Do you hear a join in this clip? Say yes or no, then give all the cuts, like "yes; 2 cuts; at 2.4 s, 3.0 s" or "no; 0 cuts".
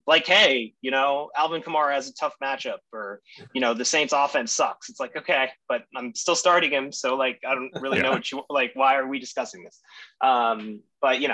no; 0 cuts